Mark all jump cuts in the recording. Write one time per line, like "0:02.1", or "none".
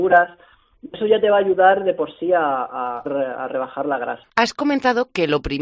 0:03.1
0:04.2